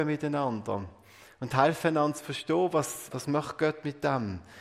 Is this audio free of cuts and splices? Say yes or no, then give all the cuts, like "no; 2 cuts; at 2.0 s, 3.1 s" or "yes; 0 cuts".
no; 1 cut; at 3.1 s